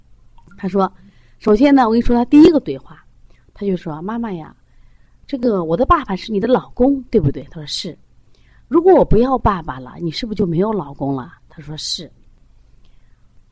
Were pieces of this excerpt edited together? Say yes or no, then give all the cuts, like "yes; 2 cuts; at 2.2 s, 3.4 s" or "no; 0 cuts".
no; 0 cuts